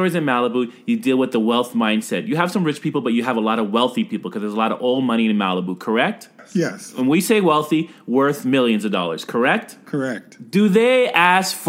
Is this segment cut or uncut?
uncut